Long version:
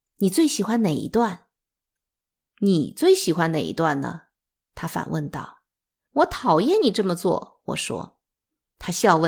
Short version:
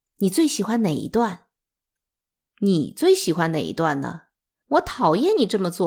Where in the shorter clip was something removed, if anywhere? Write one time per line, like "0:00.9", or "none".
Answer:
0:04.5